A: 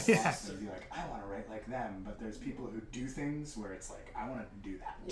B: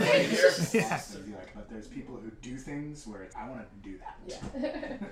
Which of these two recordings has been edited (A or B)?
B